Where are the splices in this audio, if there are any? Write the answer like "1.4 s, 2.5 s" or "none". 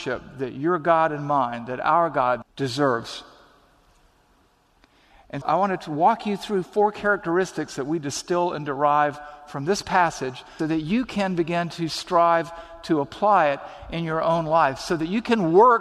2.4 s, 5.4 s, 10.6 s